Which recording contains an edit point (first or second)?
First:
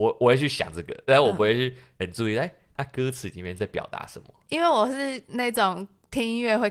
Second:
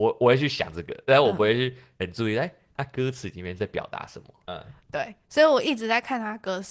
second